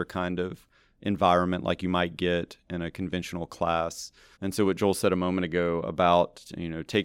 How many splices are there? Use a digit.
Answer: 1